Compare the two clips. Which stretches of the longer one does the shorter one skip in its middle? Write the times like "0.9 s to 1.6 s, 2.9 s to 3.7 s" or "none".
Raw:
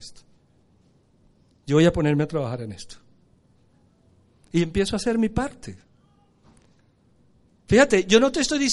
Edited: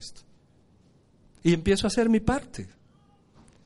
1.4 s to 4.4 s